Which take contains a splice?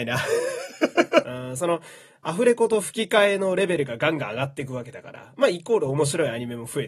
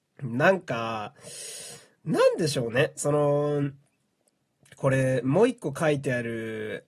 first; 2 cuts; at 1.2 s, 5.3 s

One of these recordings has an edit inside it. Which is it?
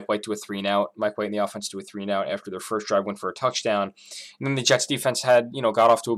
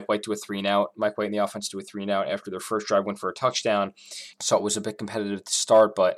second; 1 cut; at 4.3 s

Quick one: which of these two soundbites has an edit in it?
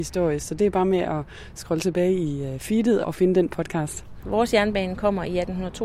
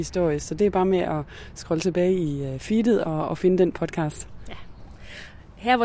first; 2 cuts; at 3.0 s, 4.2 s

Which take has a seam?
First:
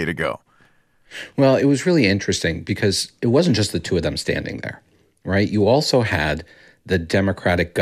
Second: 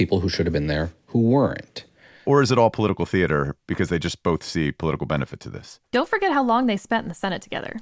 second; 2 cuts; at 2.2 s, 5.9 s

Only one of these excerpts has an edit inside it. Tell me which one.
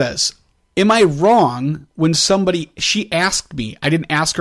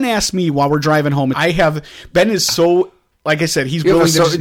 second; 1 cut; at 1.3 s

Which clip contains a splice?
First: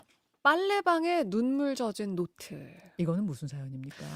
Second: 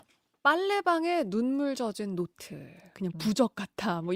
second; 1 cut; at 2.9 s

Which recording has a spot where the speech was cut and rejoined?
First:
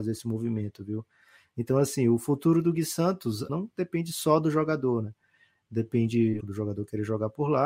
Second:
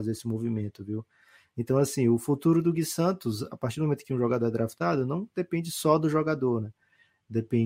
first; 2 cuts; at 3.5 s, 6.4 s

